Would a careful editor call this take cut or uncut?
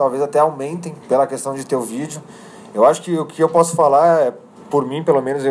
cut